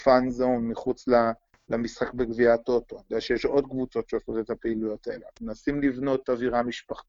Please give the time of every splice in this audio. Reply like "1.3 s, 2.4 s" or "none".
none